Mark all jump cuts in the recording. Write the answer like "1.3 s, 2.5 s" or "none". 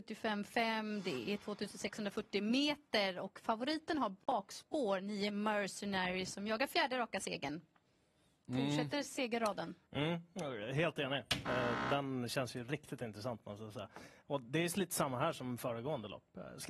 9.9 s